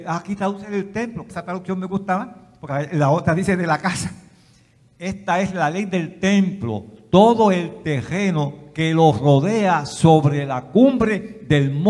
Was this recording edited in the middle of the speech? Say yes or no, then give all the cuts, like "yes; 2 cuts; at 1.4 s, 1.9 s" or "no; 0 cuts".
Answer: yes; 1 cut; at 1.3 s